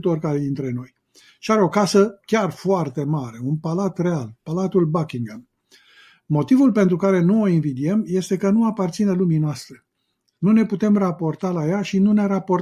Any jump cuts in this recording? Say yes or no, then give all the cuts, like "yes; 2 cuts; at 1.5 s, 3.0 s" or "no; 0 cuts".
no; 0 cuts